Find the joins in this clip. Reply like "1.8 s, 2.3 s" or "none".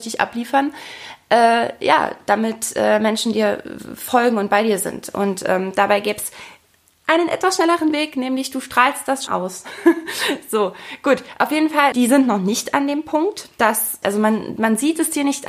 9.3 s, 11.9 s, 14.0 s